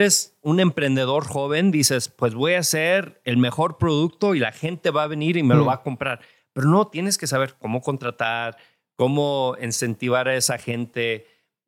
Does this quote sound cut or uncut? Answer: uncut